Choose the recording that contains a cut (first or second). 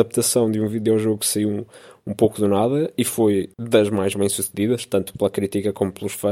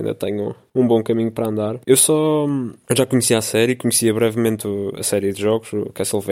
second